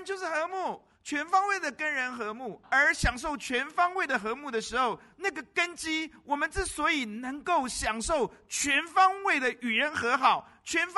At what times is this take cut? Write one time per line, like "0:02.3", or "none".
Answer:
0:02.6